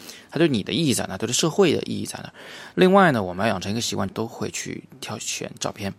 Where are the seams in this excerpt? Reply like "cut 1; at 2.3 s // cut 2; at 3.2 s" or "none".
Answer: cut 1; at 2.7 s // cut 2; at 4.1 s